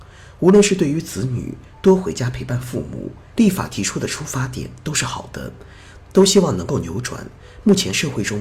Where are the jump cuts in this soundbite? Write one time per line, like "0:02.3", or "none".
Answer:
0:03.3